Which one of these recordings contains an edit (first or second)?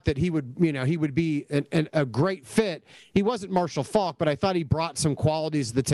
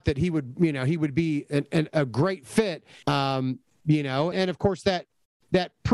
second